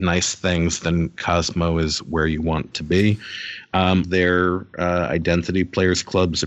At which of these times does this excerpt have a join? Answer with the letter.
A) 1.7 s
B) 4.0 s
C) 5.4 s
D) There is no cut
B